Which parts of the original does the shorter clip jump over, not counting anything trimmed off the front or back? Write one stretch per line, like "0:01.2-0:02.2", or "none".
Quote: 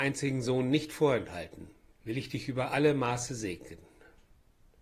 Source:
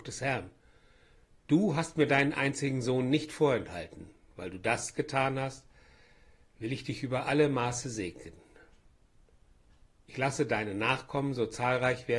0:04.3-0:06.5